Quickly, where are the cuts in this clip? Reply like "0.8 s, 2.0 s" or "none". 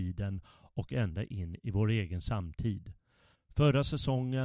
3.3 s